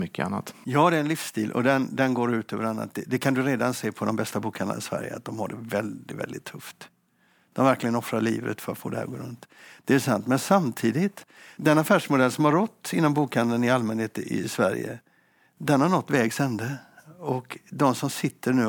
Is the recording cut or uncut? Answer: uncut